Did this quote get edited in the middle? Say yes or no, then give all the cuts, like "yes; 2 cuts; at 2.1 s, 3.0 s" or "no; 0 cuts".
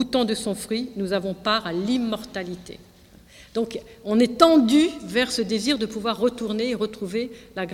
no; 0 cuts